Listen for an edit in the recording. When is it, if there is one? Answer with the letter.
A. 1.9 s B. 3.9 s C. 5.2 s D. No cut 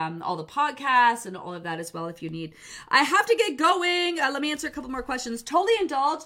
D